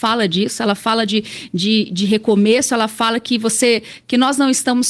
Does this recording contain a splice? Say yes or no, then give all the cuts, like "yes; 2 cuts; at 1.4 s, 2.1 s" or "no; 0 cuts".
no; 0 cuts